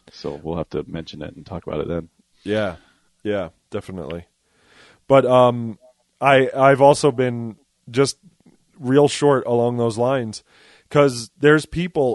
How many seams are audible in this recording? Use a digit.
0